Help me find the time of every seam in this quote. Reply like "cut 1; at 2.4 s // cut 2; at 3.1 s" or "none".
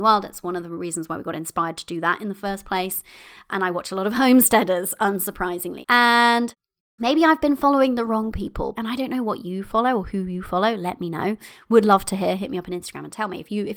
cut 1; at 5.8 s // cut 2; at 8.7 s